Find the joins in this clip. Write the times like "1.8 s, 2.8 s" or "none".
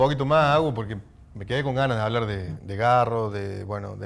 2.6 s